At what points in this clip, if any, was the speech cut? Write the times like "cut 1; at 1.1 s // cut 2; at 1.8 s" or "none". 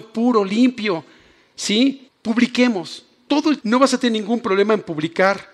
cut 1; at 2.1 s // cut 2; at 3.6 s

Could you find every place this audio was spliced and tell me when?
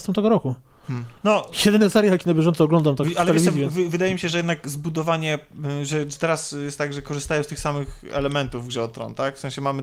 cut 1; at 1.2 s

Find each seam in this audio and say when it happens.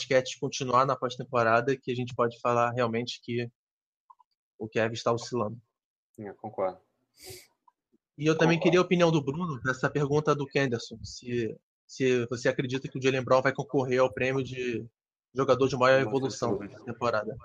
none

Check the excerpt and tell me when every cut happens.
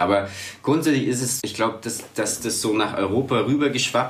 cut 1; at 1.4 s

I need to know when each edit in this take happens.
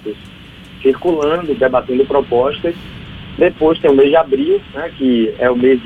cut 1; at 1.6 s

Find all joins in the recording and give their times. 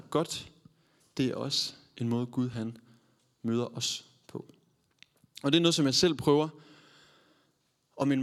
none

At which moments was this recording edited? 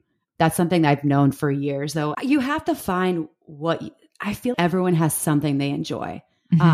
cut 1; at 2.1 s // cut 2; at 4.5 s

